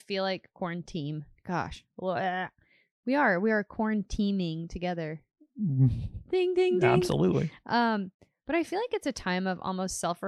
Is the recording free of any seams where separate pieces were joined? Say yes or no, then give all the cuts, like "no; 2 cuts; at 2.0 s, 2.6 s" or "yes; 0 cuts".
yes; 0 cuts